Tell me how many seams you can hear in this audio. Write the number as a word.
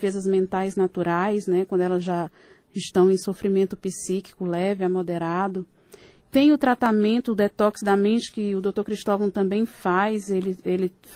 one